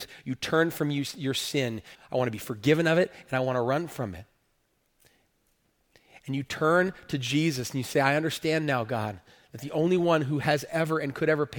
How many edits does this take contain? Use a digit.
1